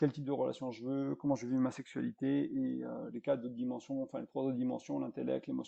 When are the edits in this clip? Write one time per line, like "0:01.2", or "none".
none

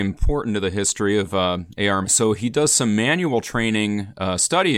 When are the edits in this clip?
0:02.0

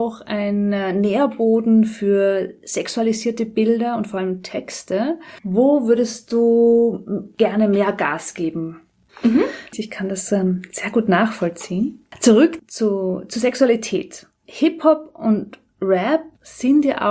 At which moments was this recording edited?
0:05.4
0:09.1

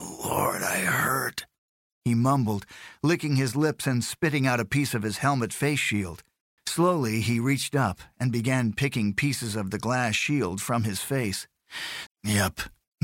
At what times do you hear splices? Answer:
0:06.6
0:12.1

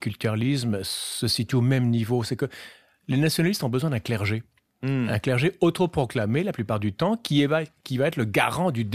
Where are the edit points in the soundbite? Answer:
none

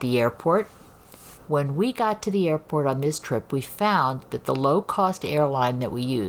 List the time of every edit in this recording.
0:01.3

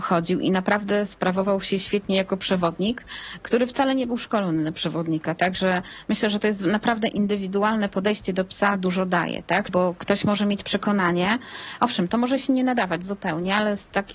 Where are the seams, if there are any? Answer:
0:09.7

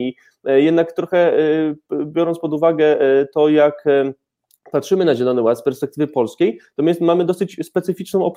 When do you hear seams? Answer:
none

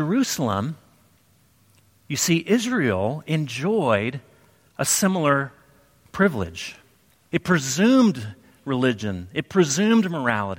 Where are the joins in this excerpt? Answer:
0:07.3

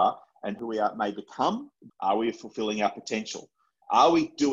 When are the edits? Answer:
0:01.9

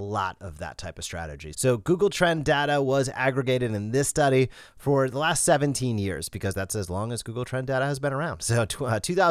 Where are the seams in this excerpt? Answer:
0:01.5

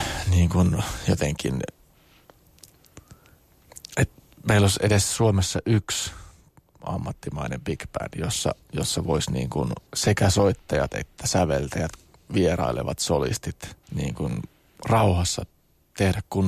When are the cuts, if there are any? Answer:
0:09.9
0:13.8

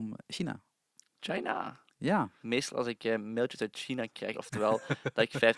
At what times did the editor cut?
0:02.4
0:04.3

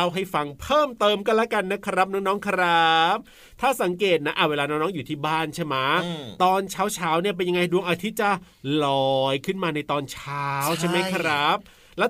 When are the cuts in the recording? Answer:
none

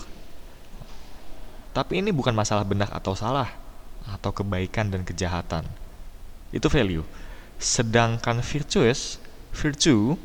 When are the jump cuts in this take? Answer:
0:01.6

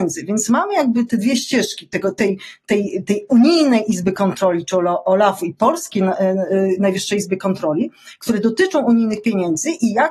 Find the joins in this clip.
none

